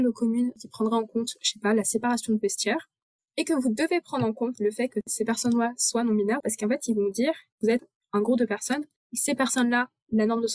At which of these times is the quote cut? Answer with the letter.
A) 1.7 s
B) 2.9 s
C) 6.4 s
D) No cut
C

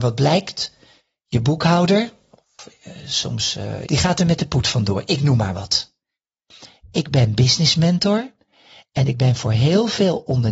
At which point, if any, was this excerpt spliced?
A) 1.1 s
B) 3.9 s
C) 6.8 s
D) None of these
B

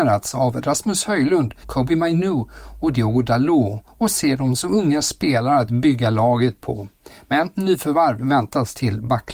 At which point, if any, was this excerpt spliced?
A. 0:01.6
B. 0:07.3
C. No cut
A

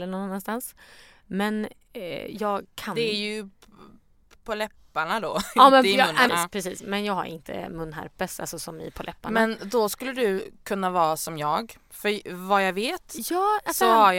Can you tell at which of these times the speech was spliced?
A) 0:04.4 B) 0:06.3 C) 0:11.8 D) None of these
B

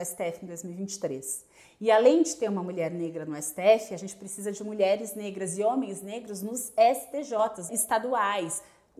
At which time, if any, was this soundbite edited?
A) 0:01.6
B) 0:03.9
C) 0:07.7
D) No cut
C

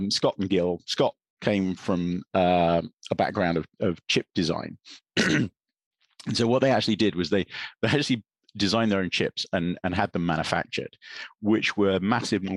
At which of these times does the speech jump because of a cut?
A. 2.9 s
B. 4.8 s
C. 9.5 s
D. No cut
D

